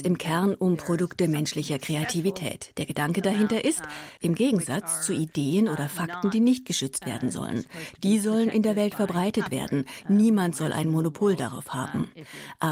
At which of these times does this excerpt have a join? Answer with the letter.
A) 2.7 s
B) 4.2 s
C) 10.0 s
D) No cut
B